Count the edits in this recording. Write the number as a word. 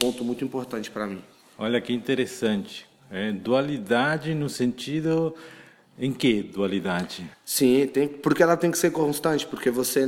one